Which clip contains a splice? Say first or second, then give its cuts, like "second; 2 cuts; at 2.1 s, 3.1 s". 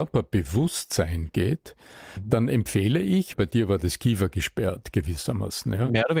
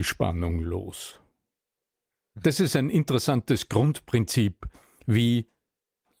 first; 1 cut; at 3.3 s